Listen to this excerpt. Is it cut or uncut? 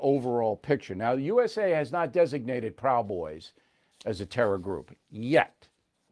uncut